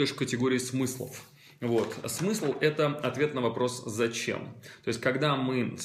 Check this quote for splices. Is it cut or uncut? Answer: uncut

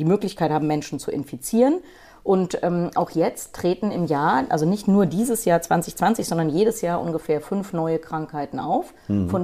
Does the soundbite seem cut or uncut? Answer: uncut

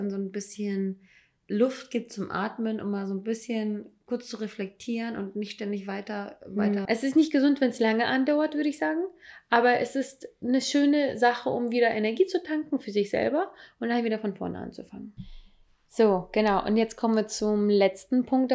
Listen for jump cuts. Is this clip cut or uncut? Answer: cut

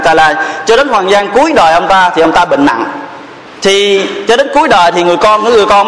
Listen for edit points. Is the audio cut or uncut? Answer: cut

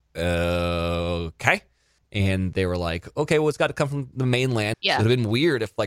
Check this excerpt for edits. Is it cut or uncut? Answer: cut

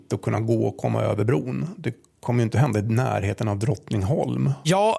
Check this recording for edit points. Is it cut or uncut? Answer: cut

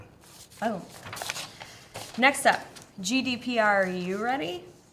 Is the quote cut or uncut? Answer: uncut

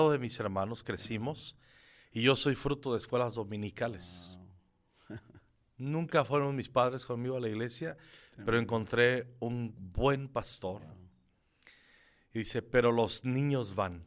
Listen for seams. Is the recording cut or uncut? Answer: cut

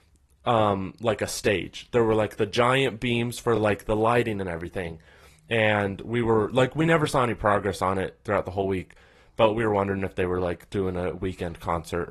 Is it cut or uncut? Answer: uncut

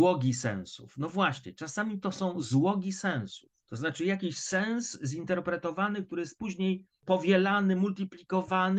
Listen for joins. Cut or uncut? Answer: uncut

